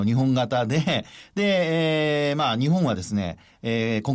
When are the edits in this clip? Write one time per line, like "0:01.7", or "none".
none

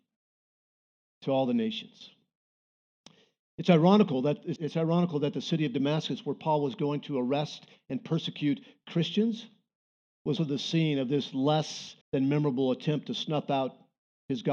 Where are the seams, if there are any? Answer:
0:04.6
0:10.4
0:12.0

